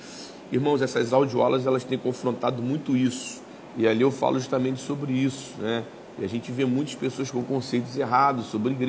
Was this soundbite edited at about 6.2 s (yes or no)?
no